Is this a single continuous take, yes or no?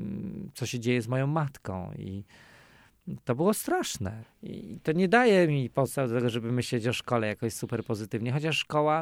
yes